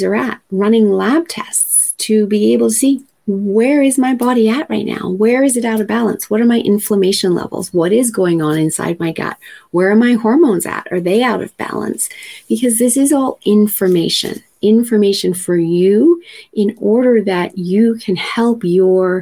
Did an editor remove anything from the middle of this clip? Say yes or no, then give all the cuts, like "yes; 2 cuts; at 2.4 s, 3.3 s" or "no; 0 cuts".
no; 0 cuts